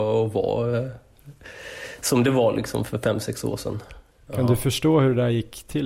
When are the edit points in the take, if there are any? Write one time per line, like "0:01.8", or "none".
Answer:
0:04.3

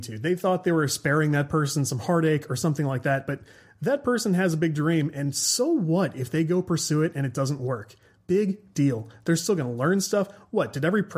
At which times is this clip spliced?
none

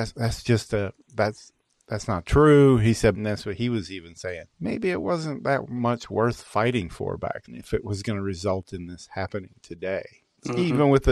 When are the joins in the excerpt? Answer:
0:03.1
0:04.5
0:07.5

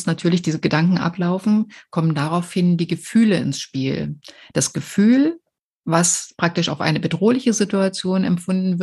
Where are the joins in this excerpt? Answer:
none

